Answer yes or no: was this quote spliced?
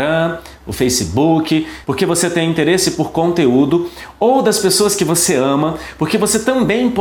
yes